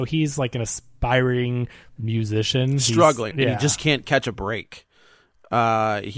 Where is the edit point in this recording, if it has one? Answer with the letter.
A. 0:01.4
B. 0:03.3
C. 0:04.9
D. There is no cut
B